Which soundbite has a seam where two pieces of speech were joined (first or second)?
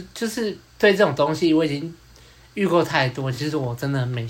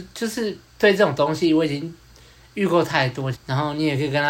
second